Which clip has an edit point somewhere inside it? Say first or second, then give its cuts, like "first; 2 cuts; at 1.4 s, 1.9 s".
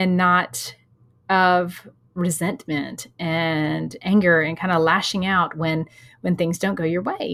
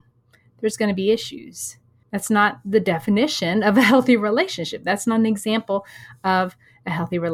second; 1 cut; at 2.0 s